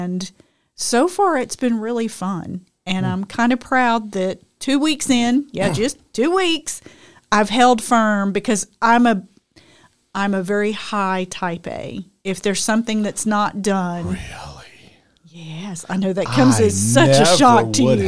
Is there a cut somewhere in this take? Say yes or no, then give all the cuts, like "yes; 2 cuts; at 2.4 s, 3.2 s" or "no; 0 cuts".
no; 0 cuts